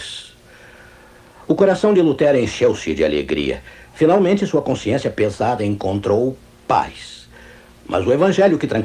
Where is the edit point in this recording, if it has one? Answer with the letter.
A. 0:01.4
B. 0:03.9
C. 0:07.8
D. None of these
A